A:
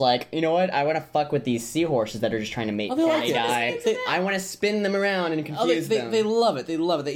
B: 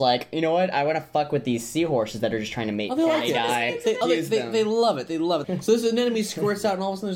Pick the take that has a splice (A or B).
B